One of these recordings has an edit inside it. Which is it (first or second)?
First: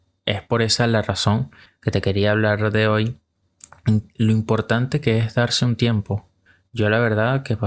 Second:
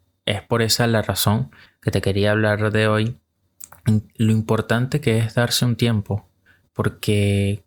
second